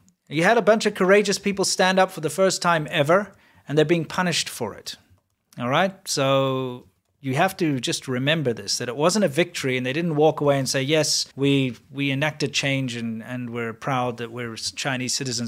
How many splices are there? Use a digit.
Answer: 1